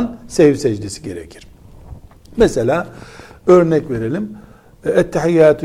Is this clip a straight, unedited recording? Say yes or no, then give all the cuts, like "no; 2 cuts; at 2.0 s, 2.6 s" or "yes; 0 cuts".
yes; 0 cuts